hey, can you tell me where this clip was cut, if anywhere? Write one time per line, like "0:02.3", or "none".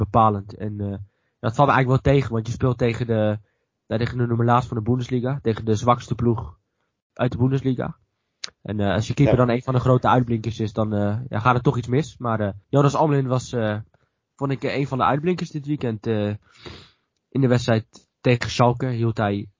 0:12.6

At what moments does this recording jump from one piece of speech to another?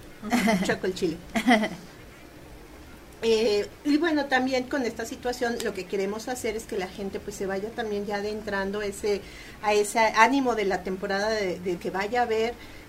0:11.8

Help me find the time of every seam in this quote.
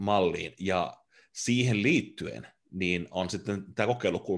none

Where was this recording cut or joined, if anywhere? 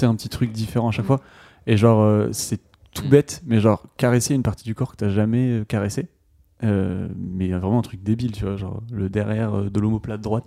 none

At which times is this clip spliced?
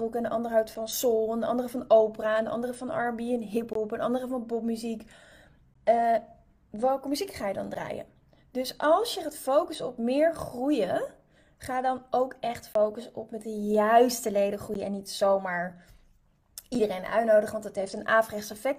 none

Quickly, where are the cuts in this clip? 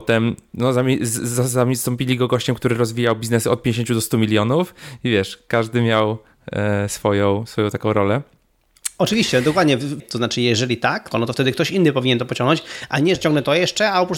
0:10.0
0:11.1
0:13.2

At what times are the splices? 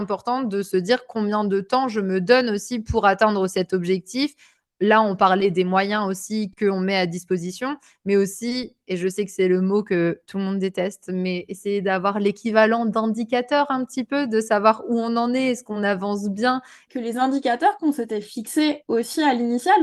0:16.9

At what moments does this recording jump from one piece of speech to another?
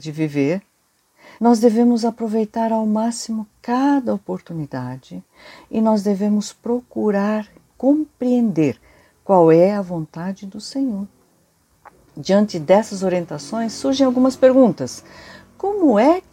0:01.4

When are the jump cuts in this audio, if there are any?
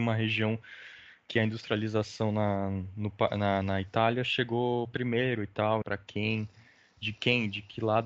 0:05.8

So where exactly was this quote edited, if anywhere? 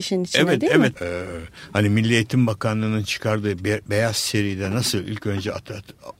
0:00.9

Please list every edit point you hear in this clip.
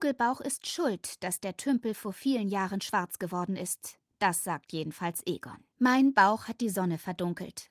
0:05.7

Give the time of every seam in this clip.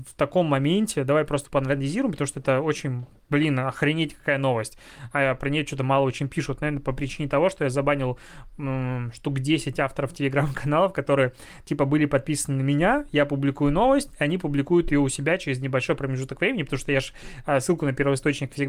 none

